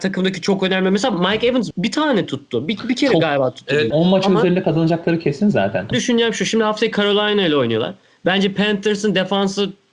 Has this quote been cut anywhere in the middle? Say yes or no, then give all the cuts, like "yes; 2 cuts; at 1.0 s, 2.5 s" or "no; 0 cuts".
yes; 3 cuts; at 1.7 s, 3.9 s, 5.9 s